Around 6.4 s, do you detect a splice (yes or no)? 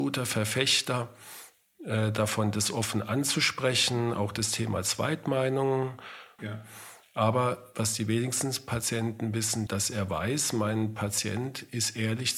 yes